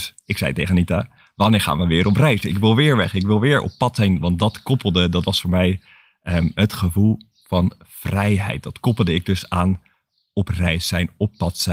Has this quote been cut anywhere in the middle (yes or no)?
no